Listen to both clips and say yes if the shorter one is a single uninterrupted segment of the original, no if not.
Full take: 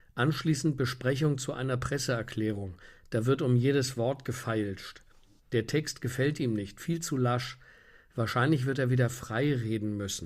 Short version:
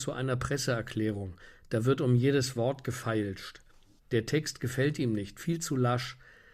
yes